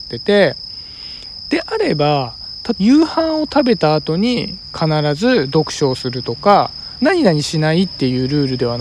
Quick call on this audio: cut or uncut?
cut